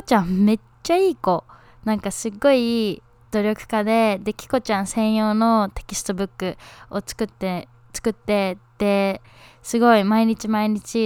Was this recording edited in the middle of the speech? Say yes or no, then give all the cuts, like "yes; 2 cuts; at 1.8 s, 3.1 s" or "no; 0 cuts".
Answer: no; 0 cuts